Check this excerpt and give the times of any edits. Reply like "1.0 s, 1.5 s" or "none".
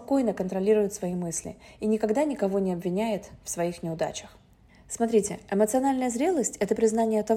none